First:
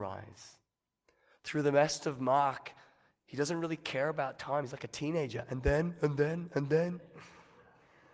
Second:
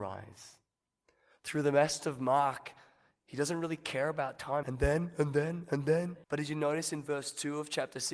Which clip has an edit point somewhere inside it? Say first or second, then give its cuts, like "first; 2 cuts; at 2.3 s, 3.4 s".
second; 2 cuts; at 4.6 s, 6.2 s